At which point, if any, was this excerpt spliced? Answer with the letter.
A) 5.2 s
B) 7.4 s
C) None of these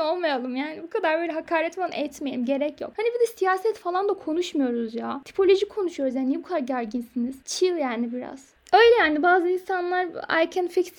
C